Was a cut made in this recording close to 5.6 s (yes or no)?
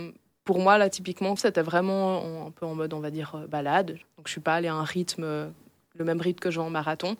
no